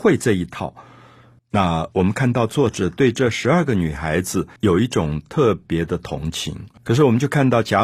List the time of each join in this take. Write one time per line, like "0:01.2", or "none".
0:01.4
0:04.6
0:06.8